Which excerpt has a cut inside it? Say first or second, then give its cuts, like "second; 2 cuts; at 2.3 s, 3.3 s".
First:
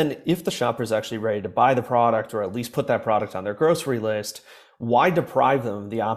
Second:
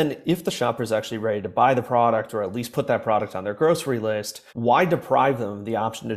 second; 1 cut; at 4.5 s